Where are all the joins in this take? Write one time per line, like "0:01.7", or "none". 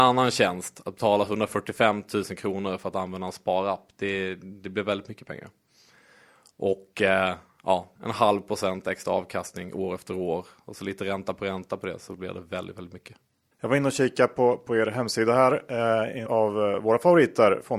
0:08.0
0:16.3